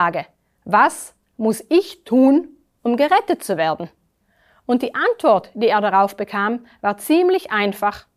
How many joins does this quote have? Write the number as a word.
zero